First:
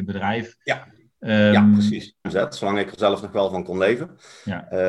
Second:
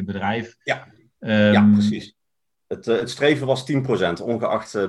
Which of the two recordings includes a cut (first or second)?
first